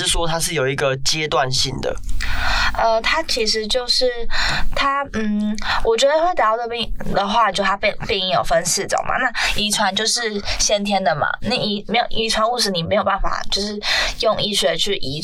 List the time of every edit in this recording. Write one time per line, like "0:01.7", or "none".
0:07.5